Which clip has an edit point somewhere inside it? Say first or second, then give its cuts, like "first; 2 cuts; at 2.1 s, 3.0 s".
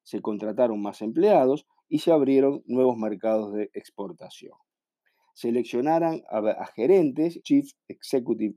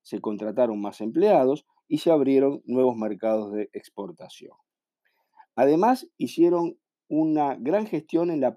first; 2 cuts; at 5.2 s, 7.4 s